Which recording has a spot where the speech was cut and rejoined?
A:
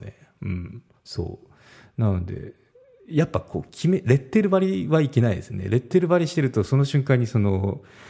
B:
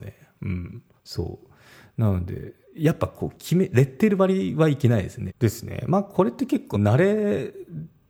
B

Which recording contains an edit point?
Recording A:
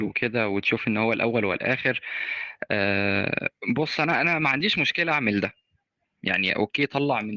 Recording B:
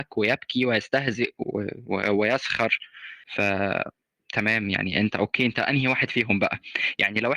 B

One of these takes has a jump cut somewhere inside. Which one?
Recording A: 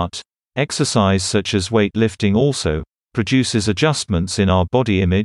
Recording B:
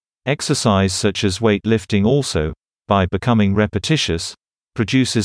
A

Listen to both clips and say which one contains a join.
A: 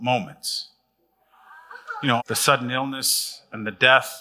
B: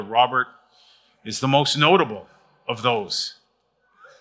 A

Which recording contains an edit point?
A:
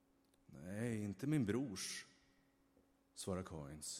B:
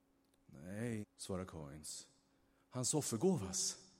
B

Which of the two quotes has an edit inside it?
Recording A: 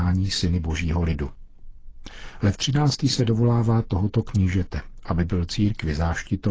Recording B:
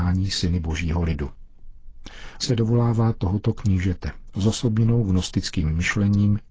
B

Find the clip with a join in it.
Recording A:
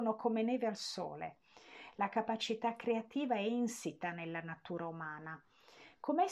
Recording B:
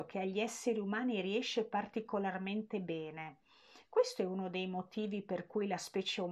A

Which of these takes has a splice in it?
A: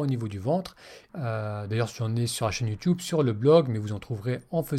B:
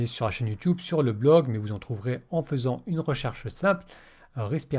A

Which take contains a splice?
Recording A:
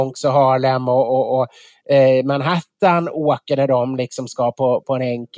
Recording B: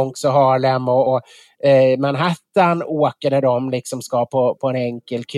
B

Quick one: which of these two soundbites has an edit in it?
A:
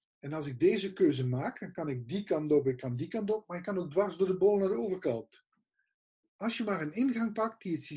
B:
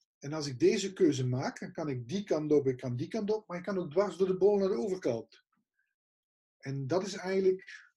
A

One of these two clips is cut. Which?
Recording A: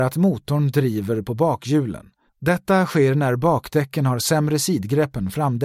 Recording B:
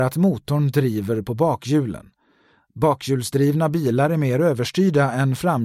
A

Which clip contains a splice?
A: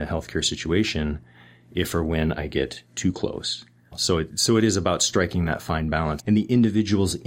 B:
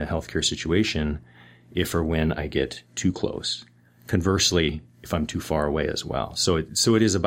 A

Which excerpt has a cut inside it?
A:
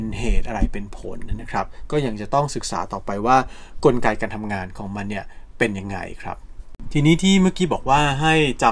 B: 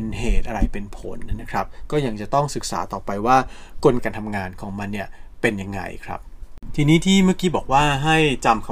B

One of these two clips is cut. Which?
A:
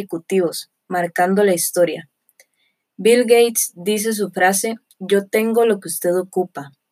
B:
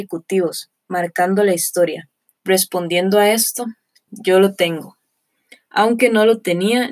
B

